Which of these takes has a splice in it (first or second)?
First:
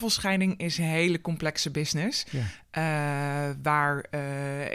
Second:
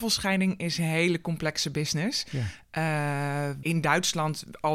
second